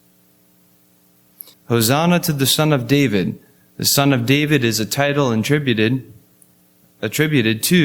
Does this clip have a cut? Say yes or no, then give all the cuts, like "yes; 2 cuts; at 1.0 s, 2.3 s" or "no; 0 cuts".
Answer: yes; 1 cut; at 1.5 s